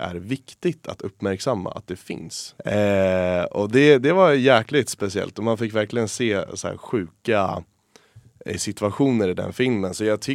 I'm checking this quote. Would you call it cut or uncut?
cut